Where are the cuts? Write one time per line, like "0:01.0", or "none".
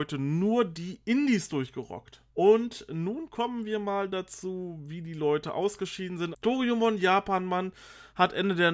0:02.3
0:06.3